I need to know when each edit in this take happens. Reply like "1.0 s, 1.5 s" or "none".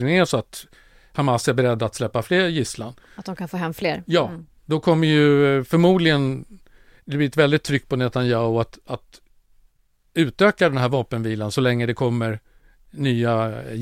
none